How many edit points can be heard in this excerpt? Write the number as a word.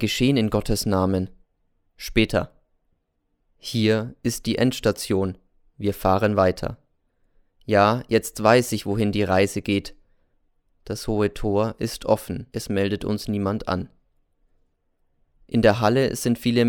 one